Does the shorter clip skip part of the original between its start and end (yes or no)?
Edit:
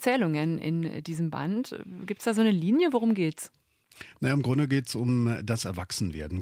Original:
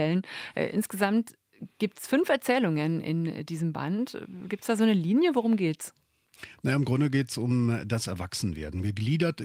no